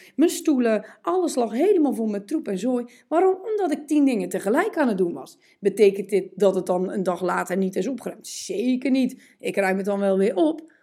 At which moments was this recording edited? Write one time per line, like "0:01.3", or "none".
none